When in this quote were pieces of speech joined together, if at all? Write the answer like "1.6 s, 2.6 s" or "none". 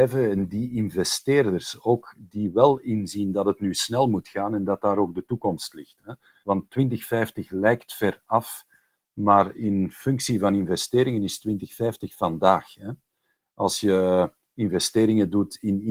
6.4 s